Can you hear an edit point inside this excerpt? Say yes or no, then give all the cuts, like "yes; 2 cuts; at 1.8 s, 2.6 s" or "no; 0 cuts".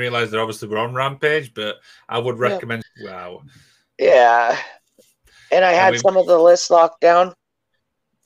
yes; 1 cut; at 2.8 s